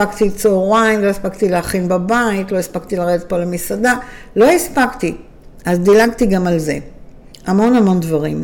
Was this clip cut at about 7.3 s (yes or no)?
yes